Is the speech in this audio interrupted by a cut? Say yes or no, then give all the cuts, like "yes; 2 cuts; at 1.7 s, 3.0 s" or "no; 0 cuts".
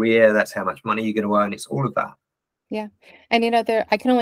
no; 0 cuts